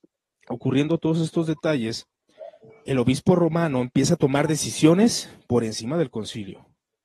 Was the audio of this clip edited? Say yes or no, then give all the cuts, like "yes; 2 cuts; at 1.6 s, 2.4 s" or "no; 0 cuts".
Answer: no; 0 cuts